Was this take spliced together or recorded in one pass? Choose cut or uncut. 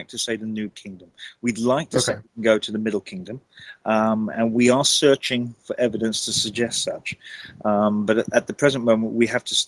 uncut